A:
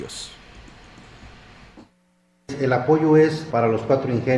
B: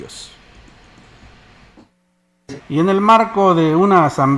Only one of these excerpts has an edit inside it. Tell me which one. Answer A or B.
B